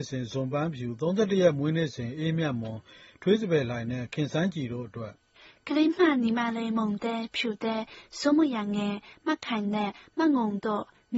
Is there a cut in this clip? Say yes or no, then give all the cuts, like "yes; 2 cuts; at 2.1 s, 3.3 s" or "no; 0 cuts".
no; 0 cuts